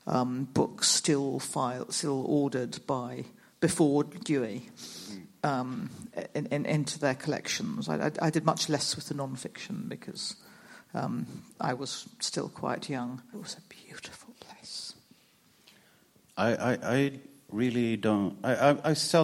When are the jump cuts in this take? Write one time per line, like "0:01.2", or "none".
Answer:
0:13.3